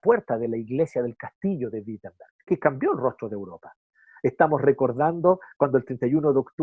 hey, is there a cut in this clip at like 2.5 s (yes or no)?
yes